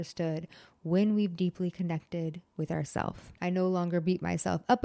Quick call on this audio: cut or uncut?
cut